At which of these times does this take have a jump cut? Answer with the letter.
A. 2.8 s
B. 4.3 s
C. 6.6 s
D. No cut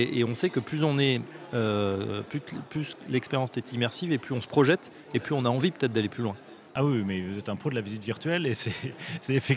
D